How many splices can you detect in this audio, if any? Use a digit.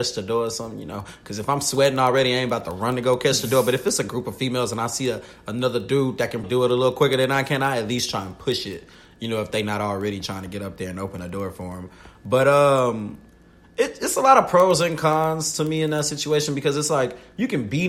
1